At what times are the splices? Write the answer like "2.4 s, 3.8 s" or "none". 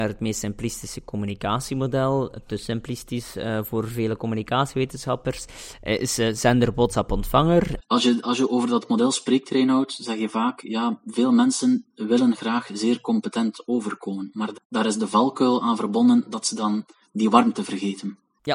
7.8 s, 14.5 s